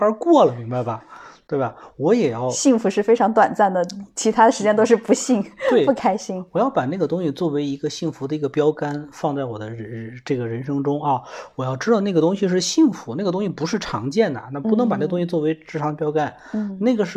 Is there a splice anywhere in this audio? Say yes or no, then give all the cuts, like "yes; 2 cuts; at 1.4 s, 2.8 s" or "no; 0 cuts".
no; 0 cuts